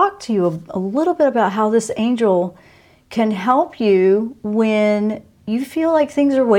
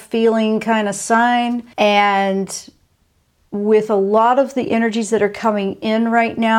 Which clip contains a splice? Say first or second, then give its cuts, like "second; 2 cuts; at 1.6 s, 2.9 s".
second; 1 cut; at 1.7 s